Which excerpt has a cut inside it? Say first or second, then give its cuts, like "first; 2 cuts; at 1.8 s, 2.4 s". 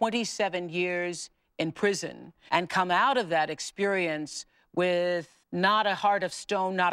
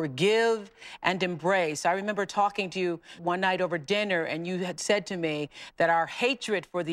first; 2 cuts; at 2.5 s, 5.4 s